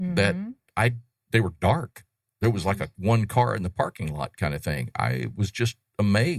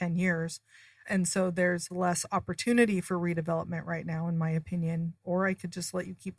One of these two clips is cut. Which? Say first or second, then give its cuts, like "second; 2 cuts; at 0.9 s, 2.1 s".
second; 1 cut; at 5.2 s